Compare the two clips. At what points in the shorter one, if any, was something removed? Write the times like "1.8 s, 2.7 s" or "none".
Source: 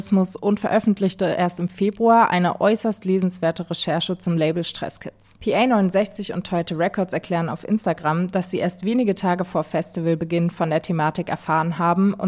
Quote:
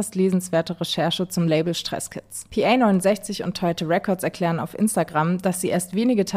none